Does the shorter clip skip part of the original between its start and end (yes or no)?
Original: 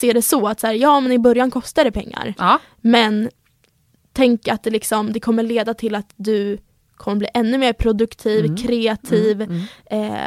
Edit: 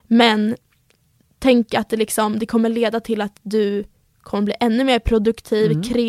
no